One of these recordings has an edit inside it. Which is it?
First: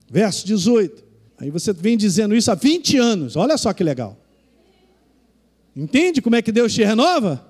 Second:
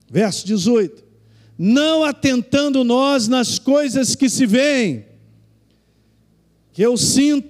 first; 1 cut; at 1.3 s

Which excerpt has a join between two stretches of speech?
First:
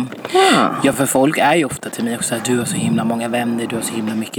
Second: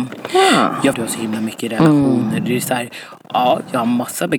second; 1 cut; at 0.9 s

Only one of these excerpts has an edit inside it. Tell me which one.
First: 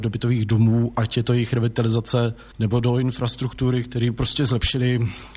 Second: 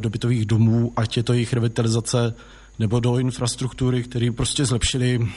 first; 1 cut; at 2.5 s

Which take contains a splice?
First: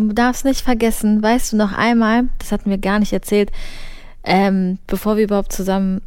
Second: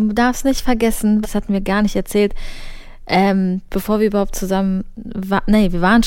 second; 1 cut; at 1.2 s

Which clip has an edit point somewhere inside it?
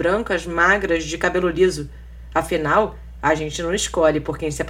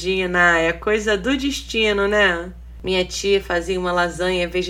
second; 1 cut; at 2.8 s

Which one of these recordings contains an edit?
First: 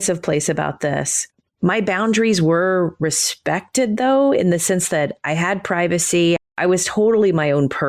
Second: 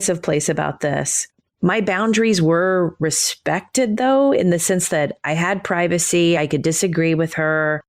first; 1 cut; at 6.4 s

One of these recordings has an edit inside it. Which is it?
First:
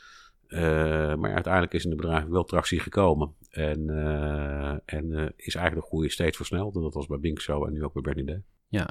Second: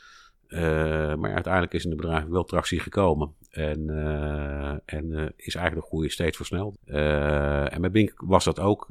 second; 1 cut; at 6.7 s

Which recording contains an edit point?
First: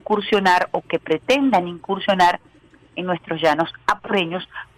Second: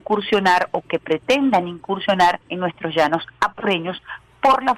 second; 1 cut; at 2.4 s

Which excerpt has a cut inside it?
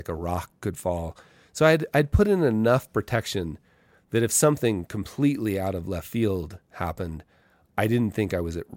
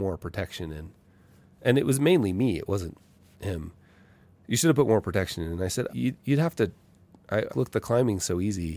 second; 2 cuts; at 5.9 s, 7.5 s

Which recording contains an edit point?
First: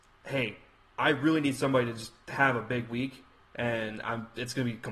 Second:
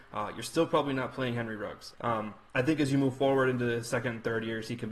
second; 1 cut; at 1.9 s

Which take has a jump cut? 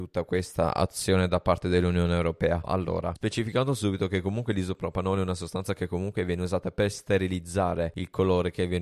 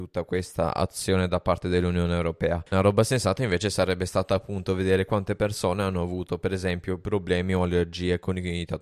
first; 1 cut; at 2.6 s

